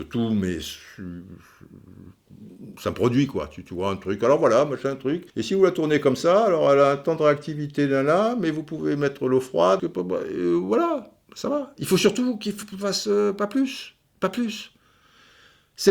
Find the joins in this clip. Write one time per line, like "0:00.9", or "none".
0:05.3
0:09.8